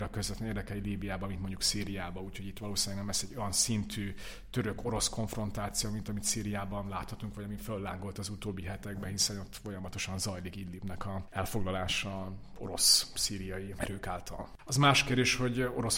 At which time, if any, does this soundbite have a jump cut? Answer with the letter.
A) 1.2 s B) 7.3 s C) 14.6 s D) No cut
C